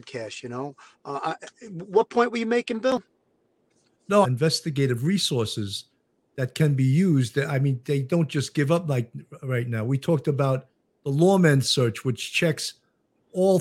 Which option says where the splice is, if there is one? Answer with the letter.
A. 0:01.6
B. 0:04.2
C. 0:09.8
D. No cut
B